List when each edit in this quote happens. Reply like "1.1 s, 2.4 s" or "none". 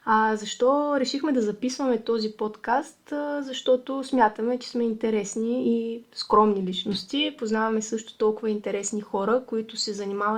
none